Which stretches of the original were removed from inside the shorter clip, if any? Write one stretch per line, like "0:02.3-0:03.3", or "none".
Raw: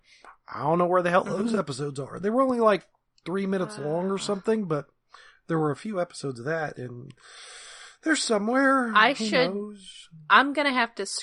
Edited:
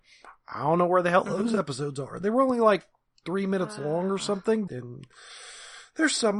0:04.7-0:06.7